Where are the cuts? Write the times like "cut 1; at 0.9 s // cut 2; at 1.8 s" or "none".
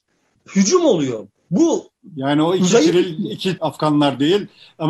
cut 1; at 3.6 s